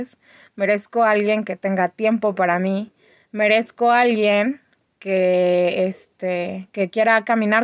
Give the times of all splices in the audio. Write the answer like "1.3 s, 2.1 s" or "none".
none